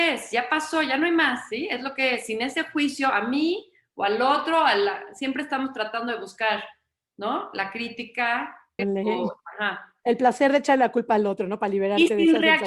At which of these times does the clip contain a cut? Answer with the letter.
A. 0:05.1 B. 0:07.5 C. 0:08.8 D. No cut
C